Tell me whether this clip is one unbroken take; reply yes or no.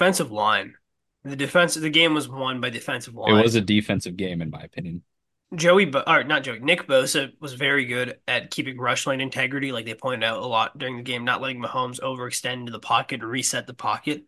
yes